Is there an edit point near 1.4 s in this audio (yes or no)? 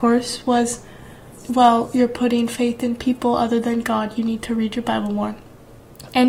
yes